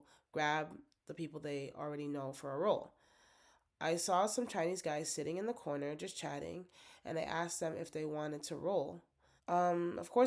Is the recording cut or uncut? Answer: cut